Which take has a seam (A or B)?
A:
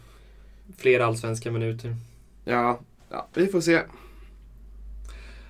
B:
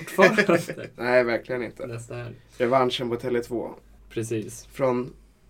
B